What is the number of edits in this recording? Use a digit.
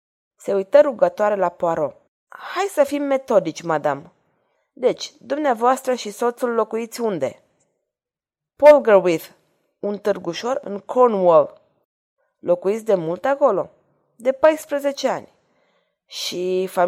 1